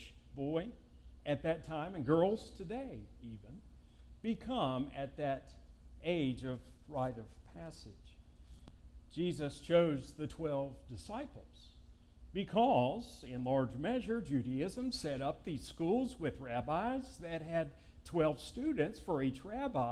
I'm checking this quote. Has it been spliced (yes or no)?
no